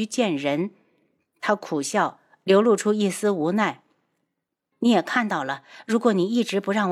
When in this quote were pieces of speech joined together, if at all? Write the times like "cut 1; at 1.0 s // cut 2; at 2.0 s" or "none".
cut 1; at 4.7 s